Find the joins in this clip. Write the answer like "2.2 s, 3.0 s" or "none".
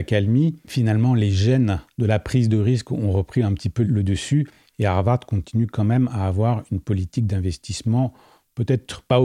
none

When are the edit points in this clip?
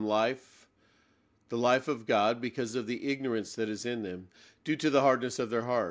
none

